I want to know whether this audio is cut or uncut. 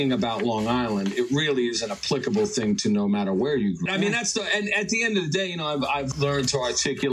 cut